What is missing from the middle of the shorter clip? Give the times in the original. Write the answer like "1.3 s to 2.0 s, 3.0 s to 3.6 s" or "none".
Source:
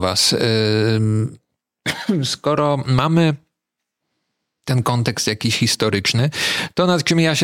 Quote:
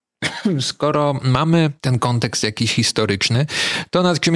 3.4 s to 4.6 s